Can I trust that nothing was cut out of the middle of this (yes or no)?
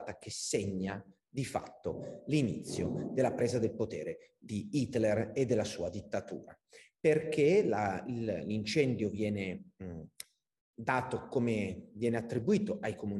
yes